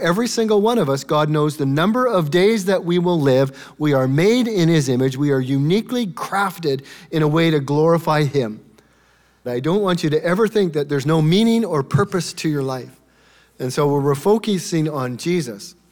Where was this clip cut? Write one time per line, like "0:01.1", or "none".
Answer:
0:09.4